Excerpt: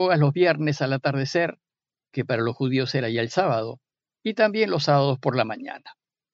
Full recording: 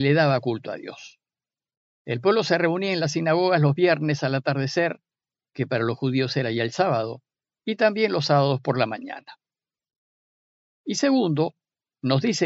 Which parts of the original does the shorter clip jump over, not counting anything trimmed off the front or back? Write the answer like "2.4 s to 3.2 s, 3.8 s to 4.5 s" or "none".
none